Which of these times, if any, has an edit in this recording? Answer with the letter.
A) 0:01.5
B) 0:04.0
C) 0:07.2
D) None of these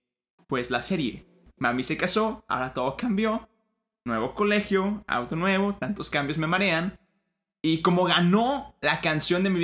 D